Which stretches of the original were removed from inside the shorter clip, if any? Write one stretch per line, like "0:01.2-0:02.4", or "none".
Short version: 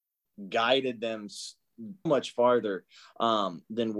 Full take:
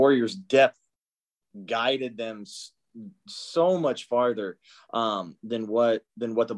0:03.2-0:03.8